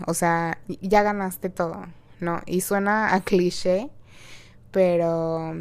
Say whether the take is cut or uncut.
uncut